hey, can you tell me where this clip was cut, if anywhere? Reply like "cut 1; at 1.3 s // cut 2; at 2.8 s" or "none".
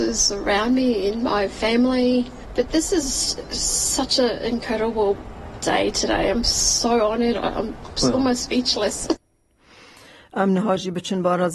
cut 1; at 7.8 s